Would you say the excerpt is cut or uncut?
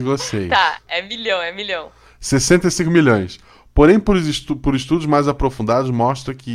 uncut